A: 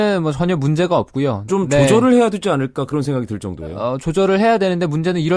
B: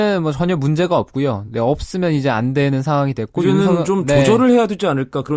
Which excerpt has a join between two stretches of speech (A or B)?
A